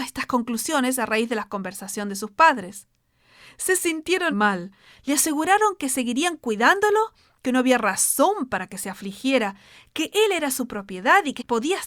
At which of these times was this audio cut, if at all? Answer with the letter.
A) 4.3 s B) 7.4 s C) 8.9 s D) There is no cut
A